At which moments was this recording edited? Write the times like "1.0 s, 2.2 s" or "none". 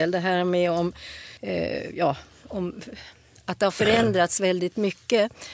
1.4 s